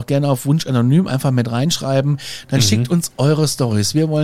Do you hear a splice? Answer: no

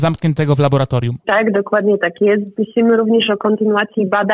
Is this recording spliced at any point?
yes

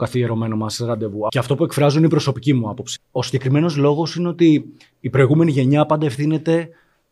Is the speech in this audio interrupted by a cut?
yes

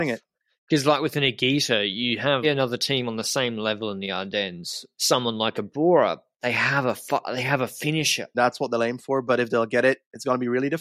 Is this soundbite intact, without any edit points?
no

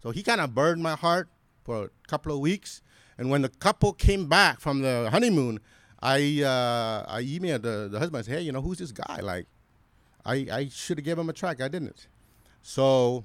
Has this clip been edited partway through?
no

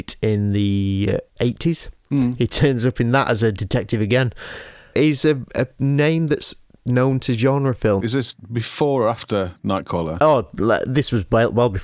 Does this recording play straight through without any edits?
no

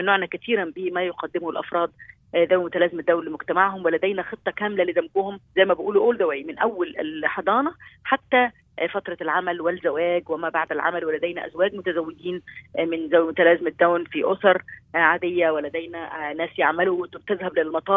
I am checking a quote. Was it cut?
yes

